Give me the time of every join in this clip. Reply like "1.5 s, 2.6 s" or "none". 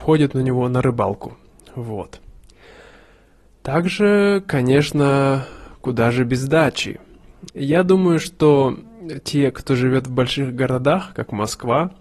7.5 s